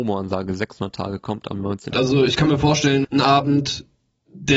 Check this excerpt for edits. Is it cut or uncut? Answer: cut